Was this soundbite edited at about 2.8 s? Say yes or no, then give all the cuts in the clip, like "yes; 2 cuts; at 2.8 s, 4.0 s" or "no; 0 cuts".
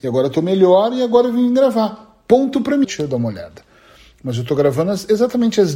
yes; 1 cut; at 2.8 s